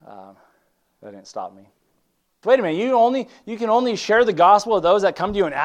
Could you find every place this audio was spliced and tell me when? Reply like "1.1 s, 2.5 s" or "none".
2.4 s